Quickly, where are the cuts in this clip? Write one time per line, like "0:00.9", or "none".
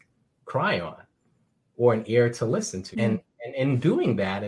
0:02.9